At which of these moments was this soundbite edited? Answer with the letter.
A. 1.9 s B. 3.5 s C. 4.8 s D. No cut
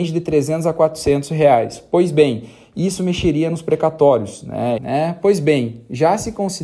C